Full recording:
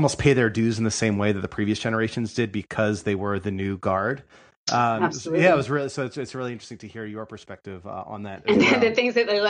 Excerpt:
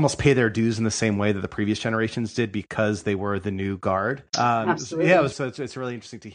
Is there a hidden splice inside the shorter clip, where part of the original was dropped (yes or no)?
yes